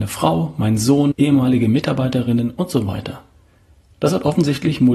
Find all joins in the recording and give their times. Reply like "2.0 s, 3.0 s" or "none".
1.1 s